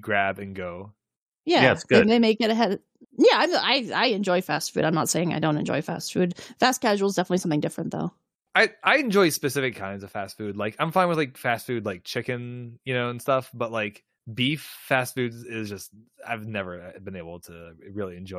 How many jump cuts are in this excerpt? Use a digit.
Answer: 0